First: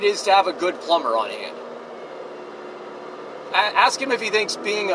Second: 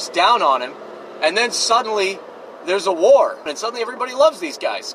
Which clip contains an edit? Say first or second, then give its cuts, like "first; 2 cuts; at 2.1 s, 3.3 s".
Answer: second; 1 cut; at 3.5 s